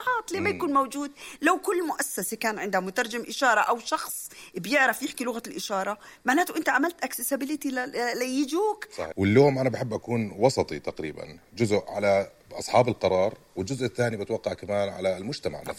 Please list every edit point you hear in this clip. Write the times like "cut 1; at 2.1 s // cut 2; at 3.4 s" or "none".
cut 1; at 9.1 s